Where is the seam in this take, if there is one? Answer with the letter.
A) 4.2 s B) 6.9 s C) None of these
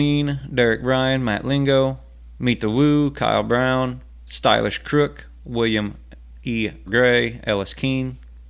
B